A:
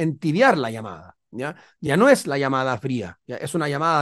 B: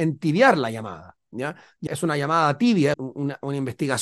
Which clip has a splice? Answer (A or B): B